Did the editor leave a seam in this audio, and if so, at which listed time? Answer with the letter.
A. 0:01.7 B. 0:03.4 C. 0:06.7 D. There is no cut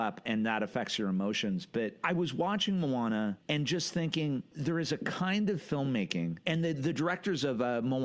B